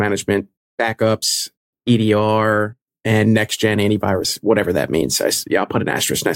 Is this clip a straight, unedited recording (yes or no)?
yes